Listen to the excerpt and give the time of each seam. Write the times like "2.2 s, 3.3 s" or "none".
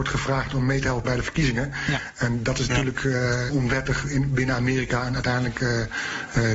3.5 s